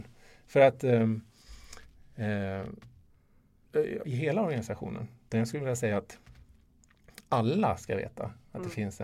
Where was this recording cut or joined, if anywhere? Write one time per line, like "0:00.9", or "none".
0:04.0
0:05.3